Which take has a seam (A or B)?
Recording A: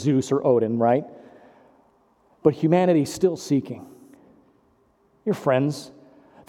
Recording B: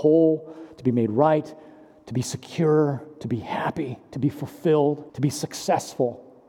B